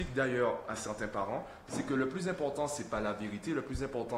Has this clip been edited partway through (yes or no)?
no